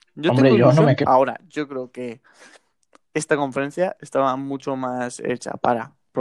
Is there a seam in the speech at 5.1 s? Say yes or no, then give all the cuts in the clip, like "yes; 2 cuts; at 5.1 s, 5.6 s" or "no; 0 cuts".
no; 1 cut; at 1.0 s